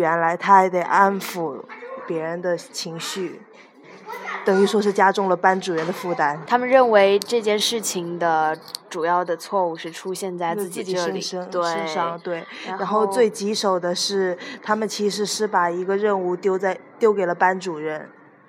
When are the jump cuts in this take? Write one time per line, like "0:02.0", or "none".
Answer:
0:06.5